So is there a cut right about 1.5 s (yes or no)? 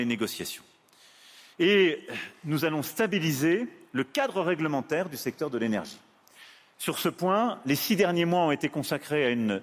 yes